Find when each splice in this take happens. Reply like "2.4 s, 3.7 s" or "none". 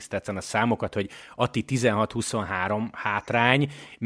none